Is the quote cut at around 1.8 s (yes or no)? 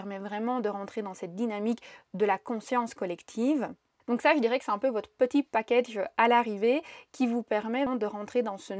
no